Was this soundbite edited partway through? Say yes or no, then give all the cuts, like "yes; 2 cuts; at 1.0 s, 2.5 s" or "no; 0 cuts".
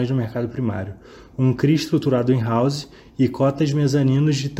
no; 0 cuts